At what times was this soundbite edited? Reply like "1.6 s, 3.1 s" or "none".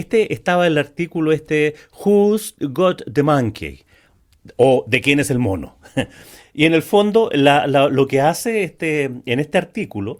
none